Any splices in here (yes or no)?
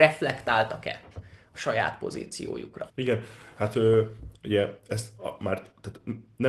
yes